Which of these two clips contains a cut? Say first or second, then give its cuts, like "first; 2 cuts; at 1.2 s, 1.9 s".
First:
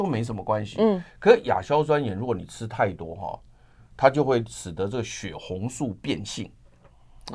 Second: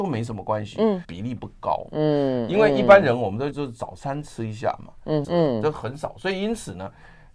second; 3 cuts; at 1.0 s, 3.5 s, 5.2 s